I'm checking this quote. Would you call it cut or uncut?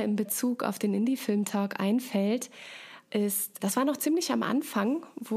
cut